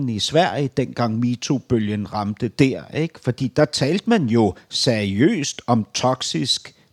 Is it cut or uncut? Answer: uncut